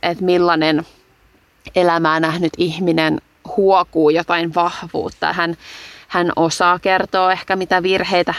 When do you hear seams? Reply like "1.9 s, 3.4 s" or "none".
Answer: 5.3 s